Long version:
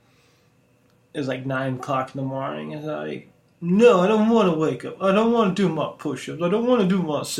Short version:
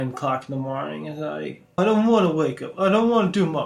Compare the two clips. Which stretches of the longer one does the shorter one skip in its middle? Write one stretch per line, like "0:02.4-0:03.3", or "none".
0:03.4-0:04.0